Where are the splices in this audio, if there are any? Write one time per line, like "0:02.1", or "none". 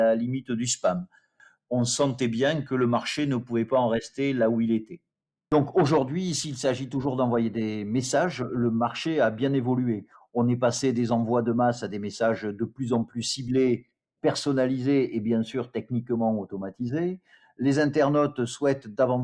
none